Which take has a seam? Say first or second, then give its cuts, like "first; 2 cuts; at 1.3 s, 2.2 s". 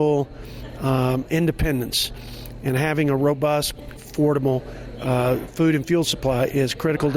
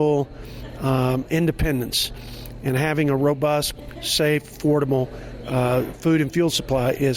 first; 1 cut; at 4.0 s